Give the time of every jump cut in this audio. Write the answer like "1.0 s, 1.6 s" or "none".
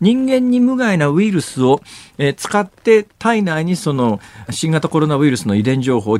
4.5 s